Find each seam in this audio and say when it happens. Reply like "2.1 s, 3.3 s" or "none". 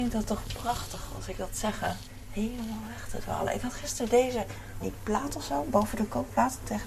4.8 s